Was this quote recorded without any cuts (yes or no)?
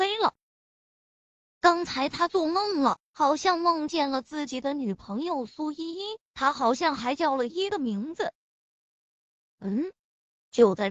no